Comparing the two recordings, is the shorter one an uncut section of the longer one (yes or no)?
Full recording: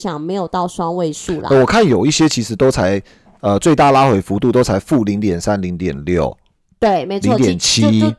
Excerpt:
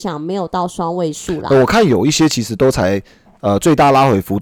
yes